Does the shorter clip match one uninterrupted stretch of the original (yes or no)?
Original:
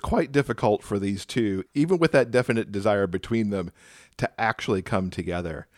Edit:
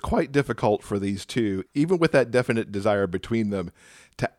yes